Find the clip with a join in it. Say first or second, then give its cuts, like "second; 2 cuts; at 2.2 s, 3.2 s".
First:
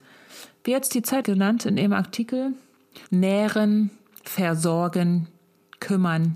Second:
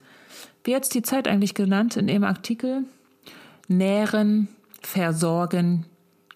first; 2 cuts; at 1.2 s, 3.1 s